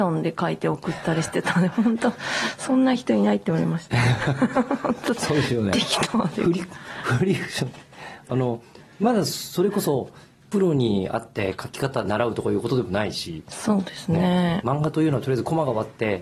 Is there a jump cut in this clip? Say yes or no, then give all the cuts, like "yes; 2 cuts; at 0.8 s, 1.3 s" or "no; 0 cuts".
no; 0 cuts